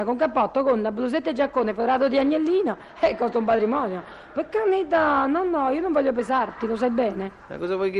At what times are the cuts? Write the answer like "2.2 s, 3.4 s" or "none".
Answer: none